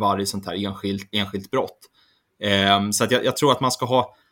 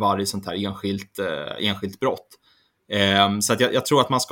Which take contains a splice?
first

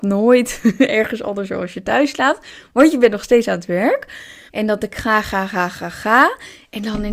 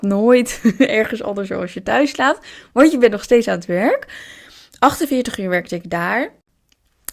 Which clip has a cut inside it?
first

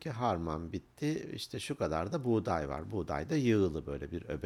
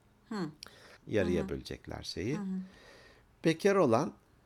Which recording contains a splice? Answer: second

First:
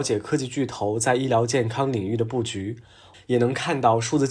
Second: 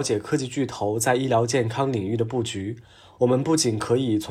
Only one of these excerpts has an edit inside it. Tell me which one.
first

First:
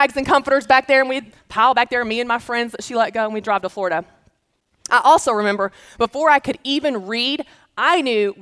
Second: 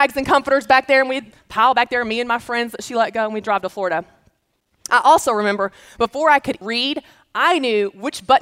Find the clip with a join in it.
second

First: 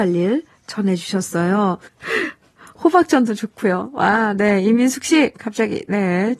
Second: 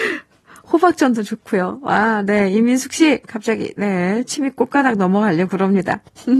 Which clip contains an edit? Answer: first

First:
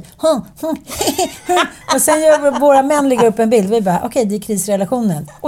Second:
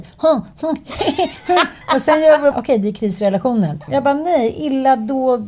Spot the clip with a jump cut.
second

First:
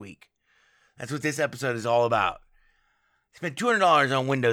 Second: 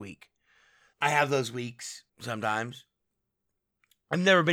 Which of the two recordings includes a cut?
second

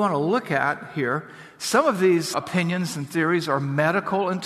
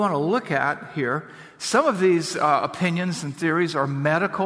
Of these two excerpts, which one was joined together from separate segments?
first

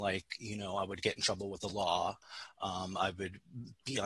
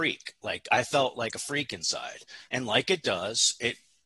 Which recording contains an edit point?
second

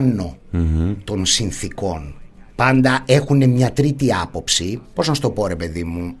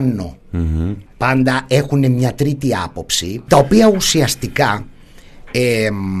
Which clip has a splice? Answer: second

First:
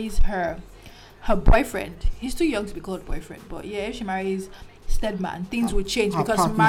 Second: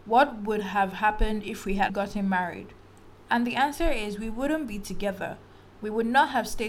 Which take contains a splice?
second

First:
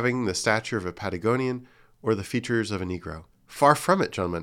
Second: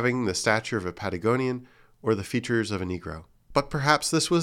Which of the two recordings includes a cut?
first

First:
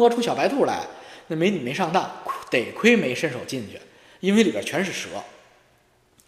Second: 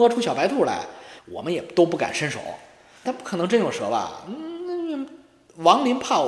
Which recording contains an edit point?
second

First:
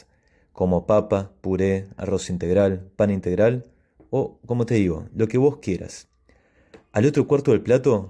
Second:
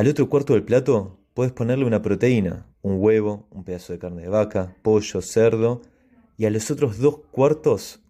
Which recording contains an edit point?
second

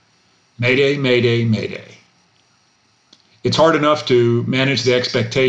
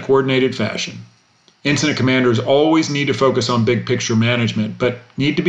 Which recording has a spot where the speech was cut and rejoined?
second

